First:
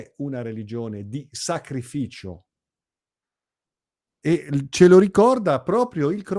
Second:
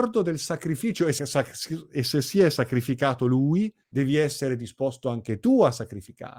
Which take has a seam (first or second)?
second